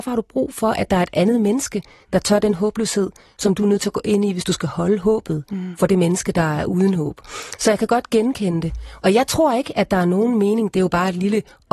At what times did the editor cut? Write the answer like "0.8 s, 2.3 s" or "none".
none